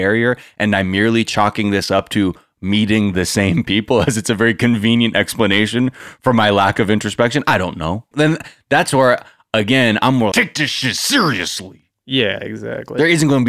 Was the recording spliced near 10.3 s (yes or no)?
yes